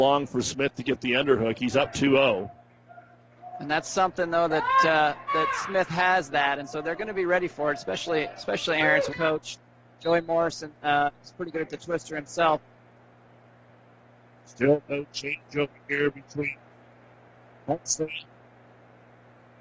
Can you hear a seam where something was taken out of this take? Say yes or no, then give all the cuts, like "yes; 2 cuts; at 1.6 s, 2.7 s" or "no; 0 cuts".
yes; 2 cuts; at 5.3 s, 9.1 s